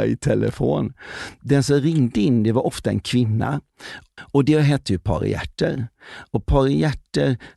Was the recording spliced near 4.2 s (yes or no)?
yes